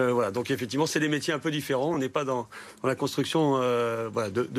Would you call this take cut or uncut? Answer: uncut